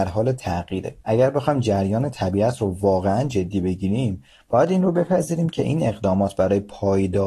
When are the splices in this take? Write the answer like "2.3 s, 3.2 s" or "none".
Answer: 1.0 s

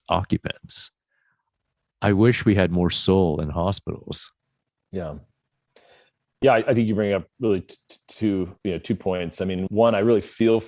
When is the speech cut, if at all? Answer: none

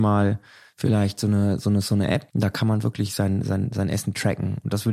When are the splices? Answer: 2.3 s

